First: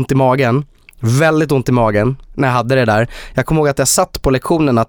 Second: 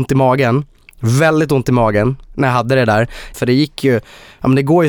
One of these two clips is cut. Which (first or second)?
second